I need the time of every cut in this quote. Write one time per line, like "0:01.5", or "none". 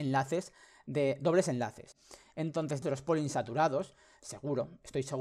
0:02.8